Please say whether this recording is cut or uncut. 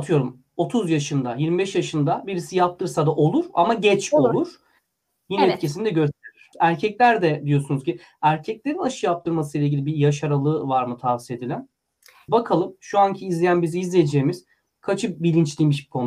cut